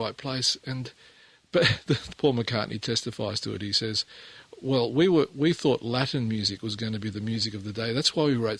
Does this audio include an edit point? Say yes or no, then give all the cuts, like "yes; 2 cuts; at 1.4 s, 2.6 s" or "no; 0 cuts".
yes; 1 cut; at 2.1 s